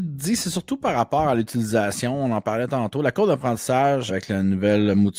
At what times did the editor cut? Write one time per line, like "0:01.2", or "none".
0:04.1